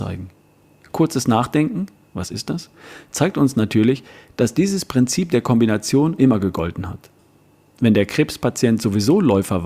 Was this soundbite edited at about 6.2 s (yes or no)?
yes